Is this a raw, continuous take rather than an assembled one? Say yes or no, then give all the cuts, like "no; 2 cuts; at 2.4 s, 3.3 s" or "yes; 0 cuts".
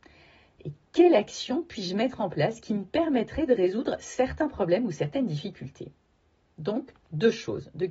yes; 0 cuts